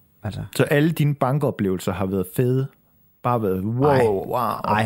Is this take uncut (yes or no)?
yes